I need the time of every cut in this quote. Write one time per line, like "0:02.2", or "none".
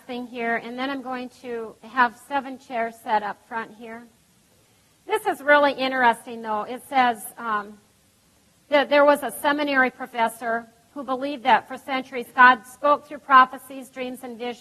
0:01.8